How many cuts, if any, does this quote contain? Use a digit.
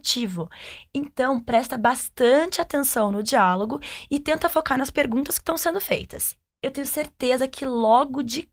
0